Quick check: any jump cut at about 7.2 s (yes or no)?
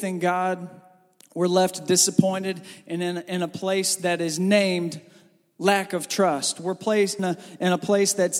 yes